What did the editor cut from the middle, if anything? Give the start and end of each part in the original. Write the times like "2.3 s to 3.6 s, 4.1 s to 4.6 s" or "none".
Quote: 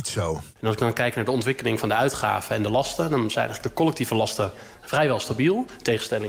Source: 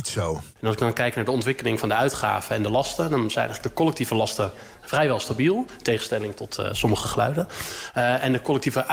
none